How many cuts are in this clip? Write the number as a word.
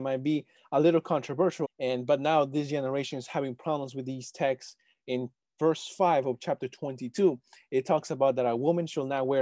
one